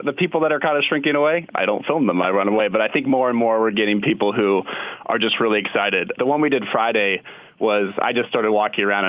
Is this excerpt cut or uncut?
uncut